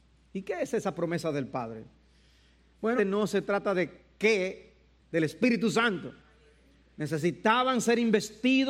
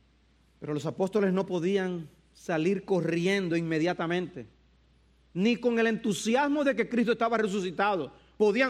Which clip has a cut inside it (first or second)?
first